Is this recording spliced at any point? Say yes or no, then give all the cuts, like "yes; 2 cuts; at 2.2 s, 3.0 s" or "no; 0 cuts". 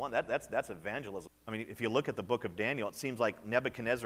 yes; 1 cut; at 1.3 s